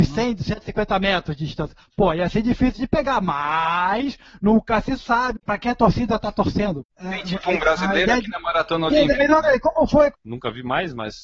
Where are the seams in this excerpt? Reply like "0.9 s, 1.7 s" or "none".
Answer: 5.3 s, 10.1 s